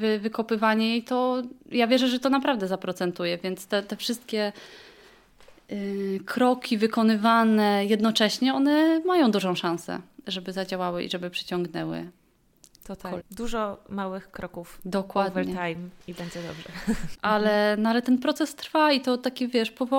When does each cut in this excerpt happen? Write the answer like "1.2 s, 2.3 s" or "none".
13.2 s, 17.1 s